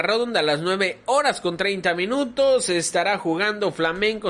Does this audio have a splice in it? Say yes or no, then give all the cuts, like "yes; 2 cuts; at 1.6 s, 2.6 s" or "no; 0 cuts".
no; 0 cuts